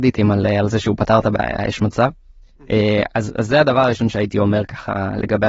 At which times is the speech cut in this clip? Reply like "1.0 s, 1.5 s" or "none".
none